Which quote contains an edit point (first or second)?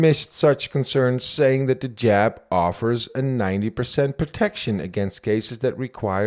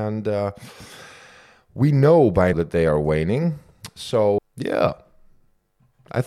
second